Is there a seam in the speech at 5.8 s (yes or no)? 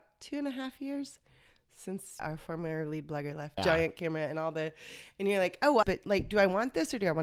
yes